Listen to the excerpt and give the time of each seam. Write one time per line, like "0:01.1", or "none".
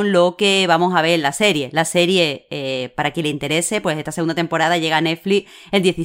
none